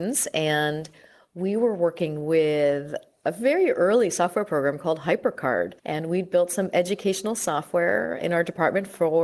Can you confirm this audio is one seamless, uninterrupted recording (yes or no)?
no